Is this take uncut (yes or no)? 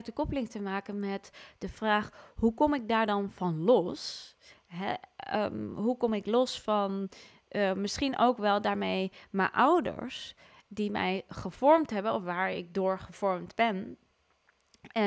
yes